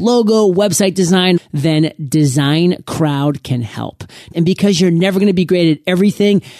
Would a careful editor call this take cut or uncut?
cut